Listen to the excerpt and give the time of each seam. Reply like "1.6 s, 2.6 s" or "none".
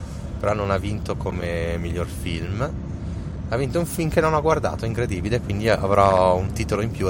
none